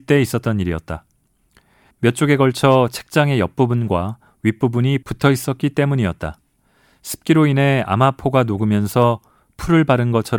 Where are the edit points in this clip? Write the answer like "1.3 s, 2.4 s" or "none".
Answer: 1.9 s